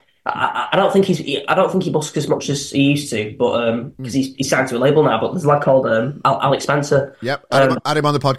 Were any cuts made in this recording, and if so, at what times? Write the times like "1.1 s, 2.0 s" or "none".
none